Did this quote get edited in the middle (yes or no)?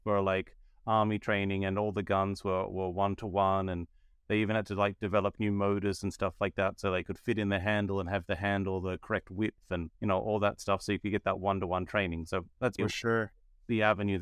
yes